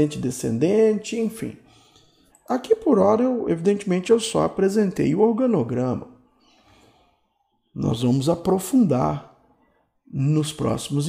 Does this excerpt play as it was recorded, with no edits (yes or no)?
no